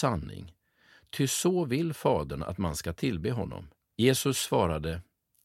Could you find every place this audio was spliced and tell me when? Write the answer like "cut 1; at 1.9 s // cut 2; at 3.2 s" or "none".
cut 1; at 3.9 s